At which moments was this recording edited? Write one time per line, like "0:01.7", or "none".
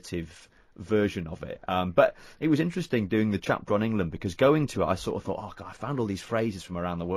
none